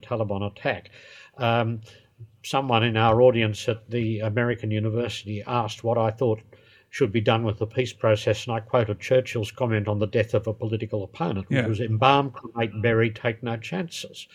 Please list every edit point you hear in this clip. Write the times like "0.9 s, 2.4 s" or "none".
none